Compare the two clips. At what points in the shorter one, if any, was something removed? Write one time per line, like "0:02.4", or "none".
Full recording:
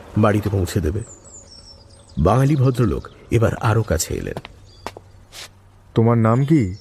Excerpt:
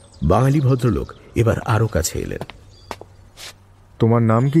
none